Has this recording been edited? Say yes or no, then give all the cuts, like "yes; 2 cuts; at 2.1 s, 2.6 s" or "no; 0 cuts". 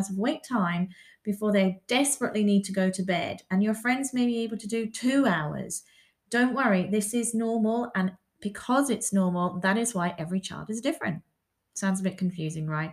no; 0 cuts